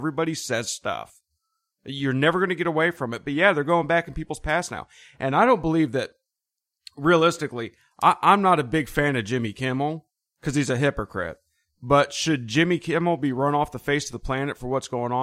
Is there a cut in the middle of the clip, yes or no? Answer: no